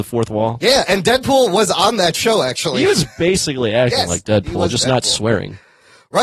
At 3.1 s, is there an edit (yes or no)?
no